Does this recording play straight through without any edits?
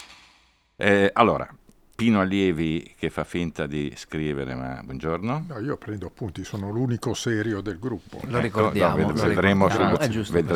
yes; 0 cuts

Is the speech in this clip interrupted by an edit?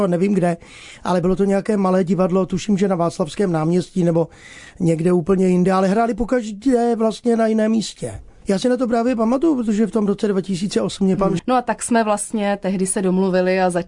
yes; 2 cuts; at 8.4 s, 11.4 s

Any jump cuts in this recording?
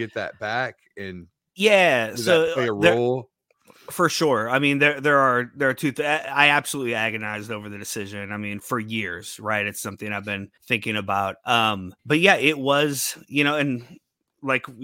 yes; 3 cuts; at 8.6 s, 10.6 s, 12.0 s

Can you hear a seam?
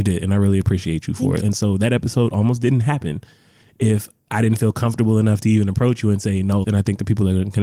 yes; 2 cuts; at 1.4 s, 6.6 s

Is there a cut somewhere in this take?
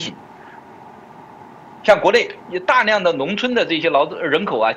yes; 1 cut; at 2.4 s

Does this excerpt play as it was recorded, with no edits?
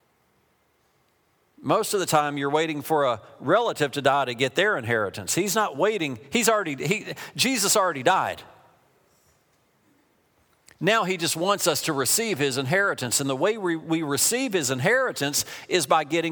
yes; 0 cuts

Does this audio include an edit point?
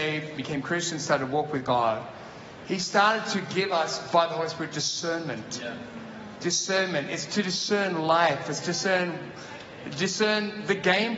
no; 0 cuts

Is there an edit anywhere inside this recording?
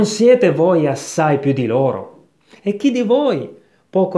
no; 0 cuts

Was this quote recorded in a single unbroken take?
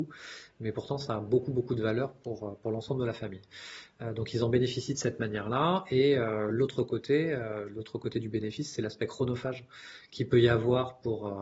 yes; 0 cuts

